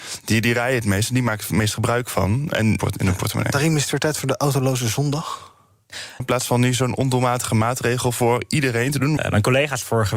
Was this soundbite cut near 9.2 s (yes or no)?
yes